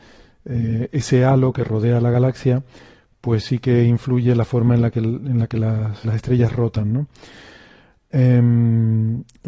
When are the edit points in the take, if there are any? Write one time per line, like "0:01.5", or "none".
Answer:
0:06.0